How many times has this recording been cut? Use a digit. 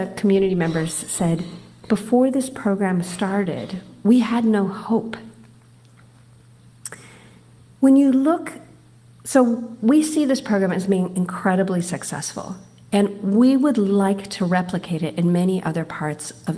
0